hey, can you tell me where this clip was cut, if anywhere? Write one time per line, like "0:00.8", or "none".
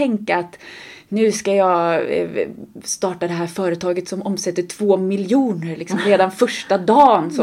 none